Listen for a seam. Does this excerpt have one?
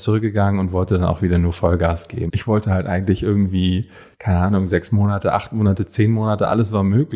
yes; 1 cut; at 2.3 s

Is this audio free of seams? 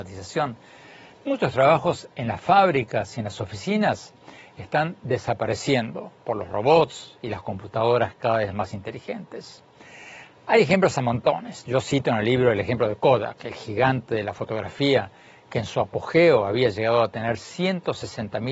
yes; 0 cuts

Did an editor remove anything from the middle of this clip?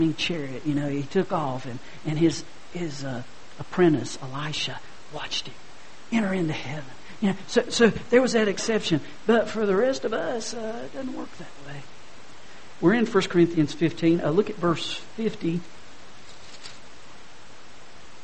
no; 0 cuts

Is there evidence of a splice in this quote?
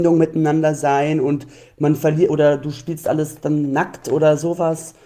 no; 0 cuts

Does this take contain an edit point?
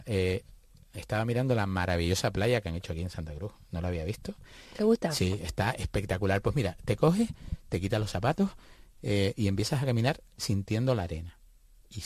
no; 0 cuts

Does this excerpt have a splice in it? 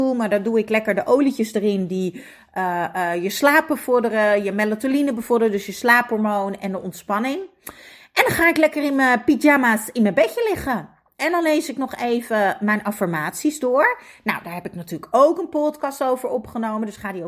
no; 0 cuts

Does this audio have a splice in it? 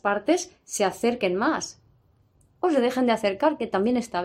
no; 0 cuts

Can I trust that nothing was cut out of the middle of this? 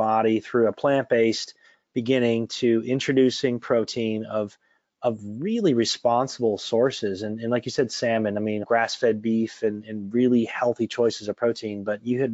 no; 2 cuts; at 8.6 s, 9.8 s

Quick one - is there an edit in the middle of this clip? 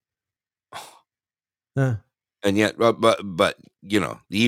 no; 0 cuts

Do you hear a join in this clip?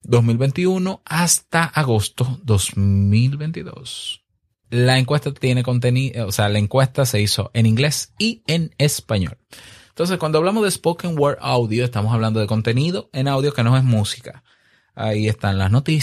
yes; 1 cut; at 4.6 s

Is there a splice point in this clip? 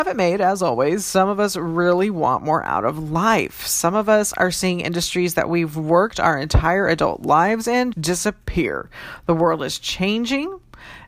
yes; 1 cut; at 7.9 s

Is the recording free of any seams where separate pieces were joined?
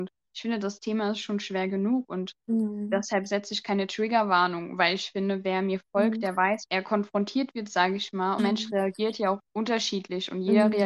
no; 3 cuts; at 6.7 s, 8.4 s, 9.5 s

